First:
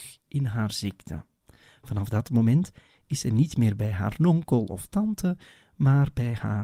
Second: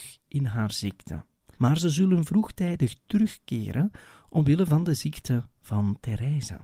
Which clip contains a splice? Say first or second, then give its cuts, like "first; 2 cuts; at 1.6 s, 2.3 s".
second; 1 cut; at 1.5 s